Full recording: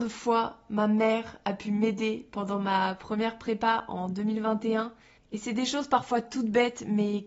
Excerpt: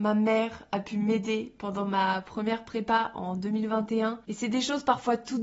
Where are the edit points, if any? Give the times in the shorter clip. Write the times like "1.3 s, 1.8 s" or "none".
4.2 s